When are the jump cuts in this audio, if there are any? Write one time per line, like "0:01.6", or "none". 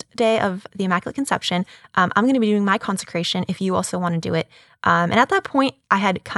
none